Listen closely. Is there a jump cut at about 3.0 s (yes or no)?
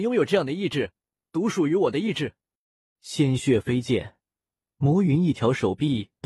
yes